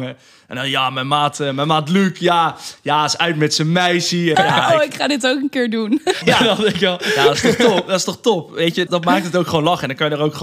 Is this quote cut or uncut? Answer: cut